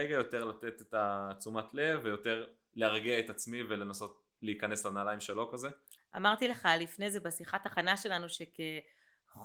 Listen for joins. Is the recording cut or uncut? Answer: cut